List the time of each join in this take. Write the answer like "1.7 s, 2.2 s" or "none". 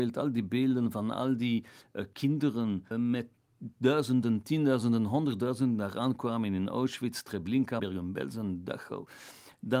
2.9 s, 7.8 s